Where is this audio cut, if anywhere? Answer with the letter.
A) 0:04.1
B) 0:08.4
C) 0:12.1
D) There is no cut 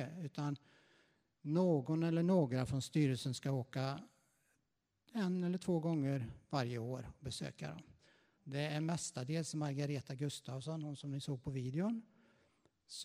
B